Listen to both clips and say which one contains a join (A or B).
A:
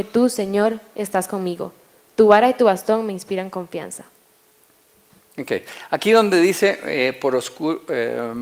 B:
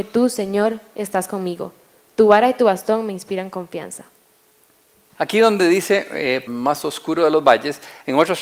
B